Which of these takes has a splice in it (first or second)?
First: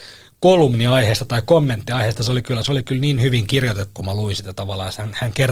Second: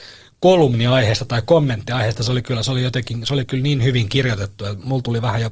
first